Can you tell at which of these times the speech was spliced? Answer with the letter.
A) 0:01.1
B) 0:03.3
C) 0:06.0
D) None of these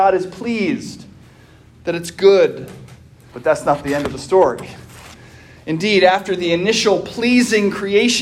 B